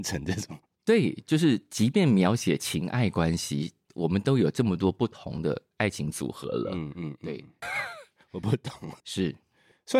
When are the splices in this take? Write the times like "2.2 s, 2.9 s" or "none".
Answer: 7.6 s, 9.0 s